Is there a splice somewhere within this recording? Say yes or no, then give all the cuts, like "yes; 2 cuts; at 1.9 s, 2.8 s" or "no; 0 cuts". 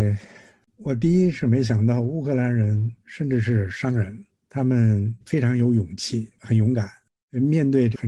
yes; 1 cut; at 3.0 s